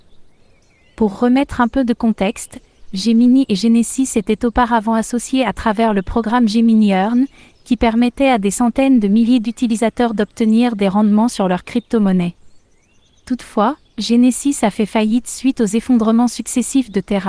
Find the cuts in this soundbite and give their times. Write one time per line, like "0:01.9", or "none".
none